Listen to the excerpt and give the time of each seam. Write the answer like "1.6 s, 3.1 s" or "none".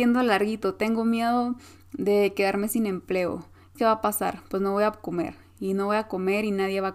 3.8 s